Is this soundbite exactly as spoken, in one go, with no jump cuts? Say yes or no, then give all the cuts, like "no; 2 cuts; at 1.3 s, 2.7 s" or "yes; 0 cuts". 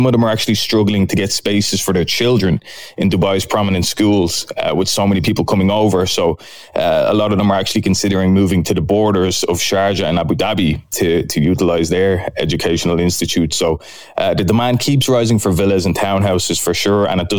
yes; 0 cuts